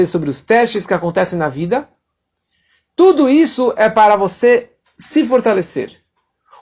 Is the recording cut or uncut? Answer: uncut